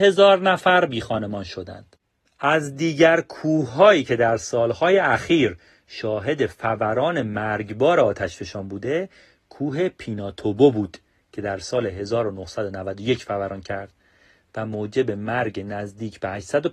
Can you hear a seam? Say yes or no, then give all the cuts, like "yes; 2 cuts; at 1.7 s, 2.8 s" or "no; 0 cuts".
no; 0 cuts